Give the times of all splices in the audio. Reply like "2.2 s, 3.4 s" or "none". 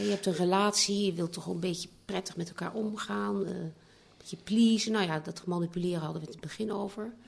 none